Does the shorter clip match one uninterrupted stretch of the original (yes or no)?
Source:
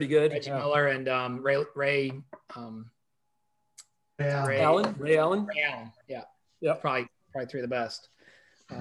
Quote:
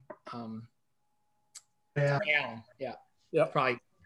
no